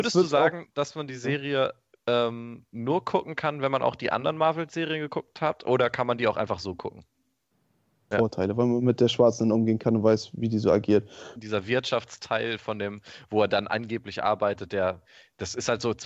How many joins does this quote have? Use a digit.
2